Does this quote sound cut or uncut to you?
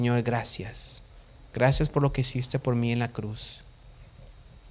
uncut